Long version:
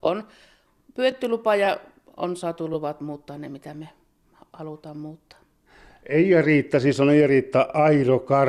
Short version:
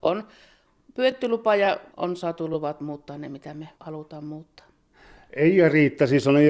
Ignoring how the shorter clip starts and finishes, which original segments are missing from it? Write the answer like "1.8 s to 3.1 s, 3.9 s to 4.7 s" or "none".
1.9 s to 2.1 s, 3.9 s to 4.5 s